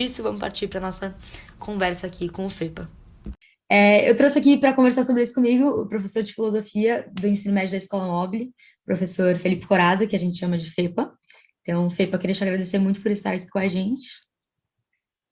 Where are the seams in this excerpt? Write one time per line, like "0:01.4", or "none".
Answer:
none